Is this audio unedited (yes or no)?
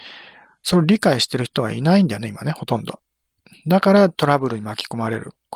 yes